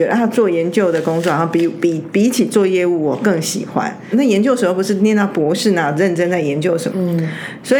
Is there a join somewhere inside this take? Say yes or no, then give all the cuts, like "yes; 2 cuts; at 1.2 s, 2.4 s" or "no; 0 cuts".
yes; 2 cuts; at 4.1 s, 6.9 s